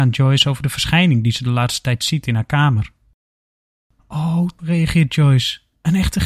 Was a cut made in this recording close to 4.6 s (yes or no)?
yes